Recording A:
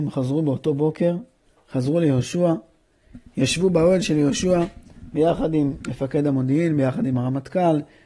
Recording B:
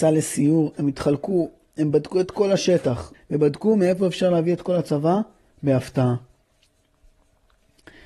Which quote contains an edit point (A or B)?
B